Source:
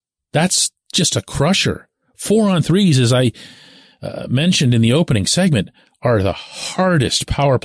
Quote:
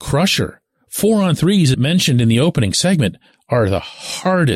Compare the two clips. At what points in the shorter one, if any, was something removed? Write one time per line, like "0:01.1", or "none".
0:01.7